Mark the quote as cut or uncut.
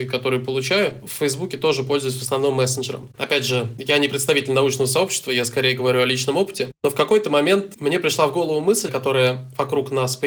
cut